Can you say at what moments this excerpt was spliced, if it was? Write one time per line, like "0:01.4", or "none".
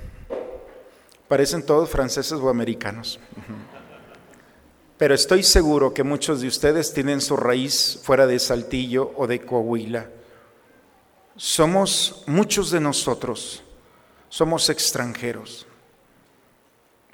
none

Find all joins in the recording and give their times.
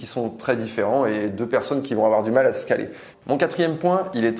0:03.1

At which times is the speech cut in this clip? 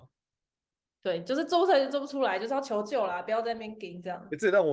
none

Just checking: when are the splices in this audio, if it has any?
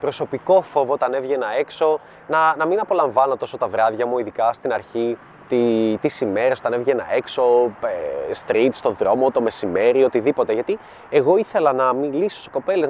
none

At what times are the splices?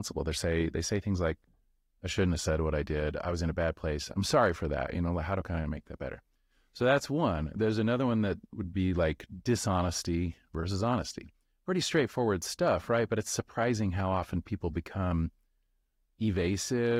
none

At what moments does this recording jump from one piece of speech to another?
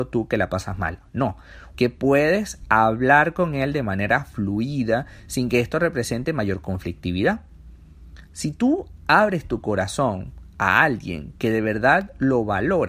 0:01.7

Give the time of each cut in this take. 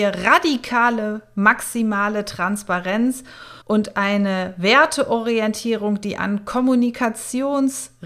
0:03.6

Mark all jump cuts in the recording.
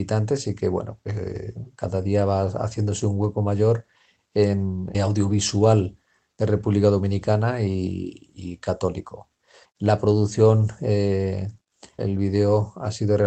0:04.9
0:09.6
0:12.0

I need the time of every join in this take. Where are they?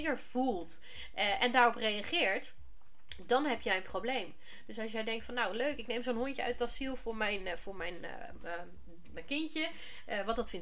none

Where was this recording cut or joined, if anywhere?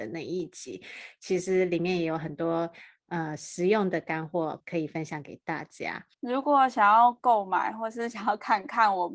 0:06.1

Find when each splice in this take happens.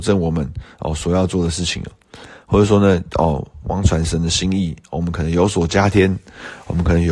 0:03.6

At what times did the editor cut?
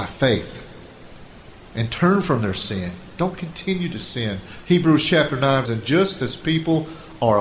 0:04.6
0:05.6

